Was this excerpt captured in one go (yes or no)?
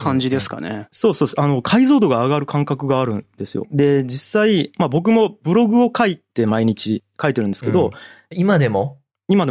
no